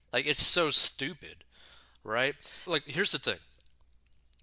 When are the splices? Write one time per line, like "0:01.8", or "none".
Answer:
0:02.7